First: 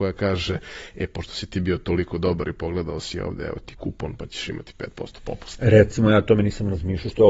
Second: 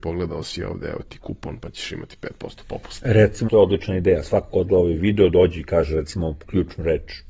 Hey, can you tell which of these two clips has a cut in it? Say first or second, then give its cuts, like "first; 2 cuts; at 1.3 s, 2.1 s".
second; 1 cut; at 3.4 s